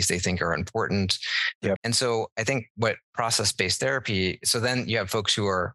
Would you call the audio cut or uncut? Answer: cut